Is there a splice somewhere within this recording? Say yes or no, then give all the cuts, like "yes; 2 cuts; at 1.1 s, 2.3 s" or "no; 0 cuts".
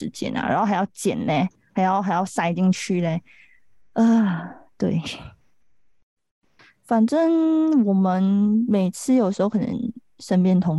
no; 0 cuts